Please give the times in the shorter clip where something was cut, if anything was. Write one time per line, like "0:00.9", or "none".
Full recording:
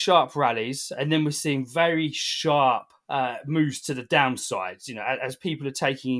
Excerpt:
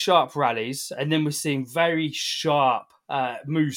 none